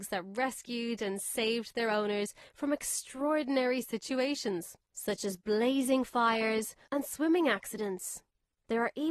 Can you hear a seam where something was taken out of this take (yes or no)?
yes